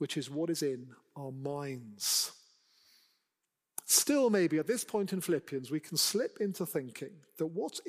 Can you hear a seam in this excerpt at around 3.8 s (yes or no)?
no